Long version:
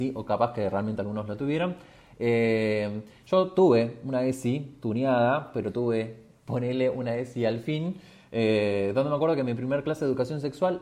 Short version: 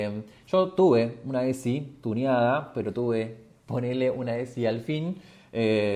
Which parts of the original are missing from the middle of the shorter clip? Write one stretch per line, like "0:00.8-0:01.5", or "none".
none